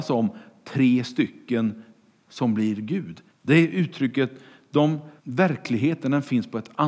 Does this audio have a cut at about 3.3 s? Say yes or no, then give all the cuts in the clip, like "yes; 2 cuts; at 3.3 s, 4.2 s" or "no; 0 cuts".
yes; 2 cuts; at 3.3 s, 5.2 s